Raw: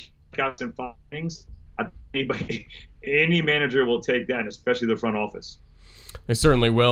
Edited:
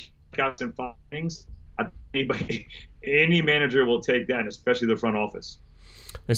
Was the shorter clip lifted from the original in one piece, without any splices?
yes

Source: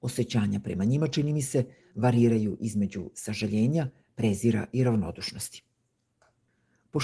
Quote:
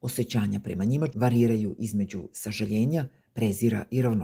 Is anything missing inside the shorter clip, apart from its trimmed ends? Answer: yes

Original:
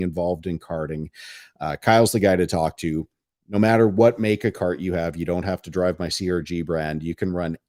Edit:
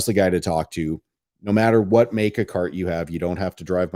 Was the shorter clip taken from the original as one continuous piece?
yes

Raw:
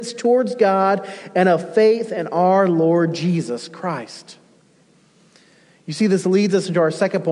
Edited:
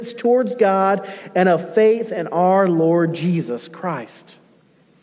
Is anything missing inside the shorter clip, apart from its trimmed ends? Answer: no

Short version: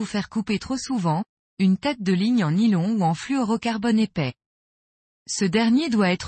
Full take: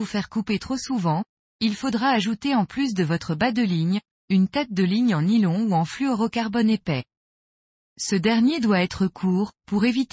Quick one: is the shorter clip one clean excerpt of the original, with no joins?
no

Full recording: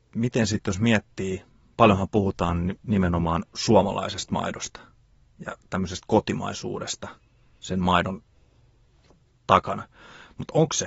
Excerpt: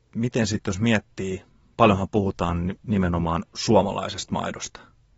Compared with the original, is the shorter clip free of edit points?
yes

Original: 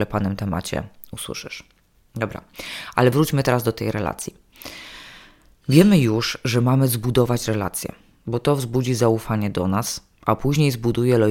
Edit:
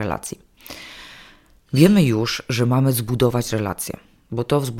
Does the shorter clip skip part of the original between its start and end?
no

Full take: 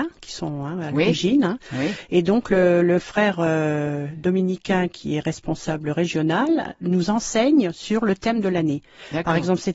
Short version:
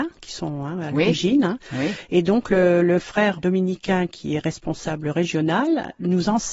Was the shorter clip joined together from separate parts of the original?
yes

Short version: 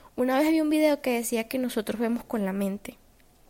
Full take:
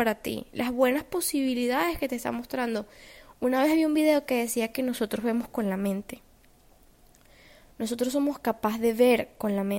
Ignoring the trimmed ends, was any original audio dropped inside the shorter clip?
no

